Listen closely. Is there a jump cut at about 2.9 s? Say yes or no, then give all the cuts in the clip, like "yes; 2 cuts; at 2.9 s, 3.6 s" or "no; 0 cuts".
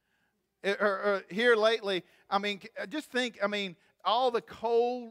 no; 0 cuts